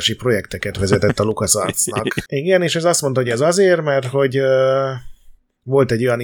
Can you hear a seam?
yes; 1 cut; at 2.3 s

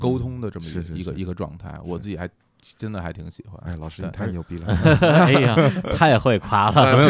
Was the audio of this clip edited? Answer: no; 0 cuts

